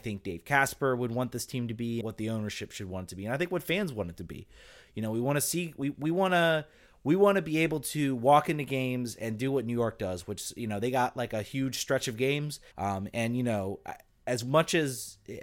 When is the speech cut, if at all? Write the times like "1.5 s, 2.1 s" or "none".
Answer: 2.0 s, 12.7 s